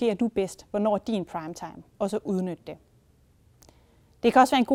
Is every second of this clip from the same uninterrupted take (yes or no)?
no